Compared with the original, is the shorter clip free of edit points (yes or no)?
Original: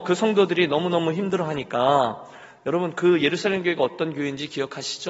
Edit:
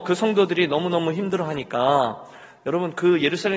yes